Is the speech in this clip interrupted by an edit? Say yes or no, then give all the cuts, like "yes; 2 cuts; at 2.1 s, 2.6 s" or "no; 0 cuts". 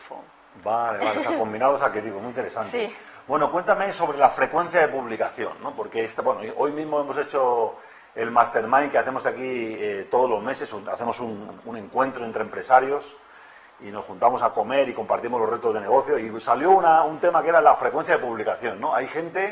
no; 0 cuts